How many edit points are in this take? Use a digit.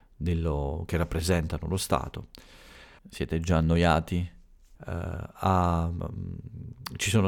2